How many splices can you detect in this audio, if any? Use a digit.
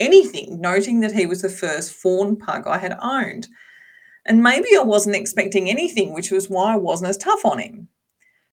0